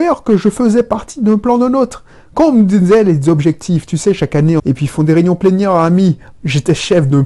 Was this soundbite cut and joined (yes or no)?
yes